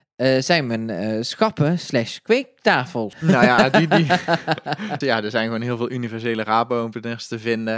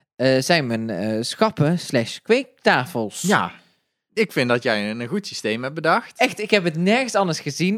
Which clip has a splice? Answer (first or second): first